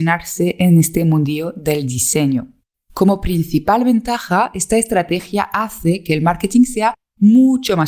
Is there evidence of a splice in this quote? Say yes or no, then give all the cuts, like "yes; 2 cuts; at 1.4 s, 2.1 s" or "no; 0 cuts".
yes; 1 cut; at 2.7 s